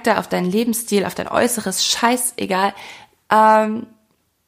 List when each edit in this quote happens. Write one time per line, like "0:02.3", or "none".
0:03.2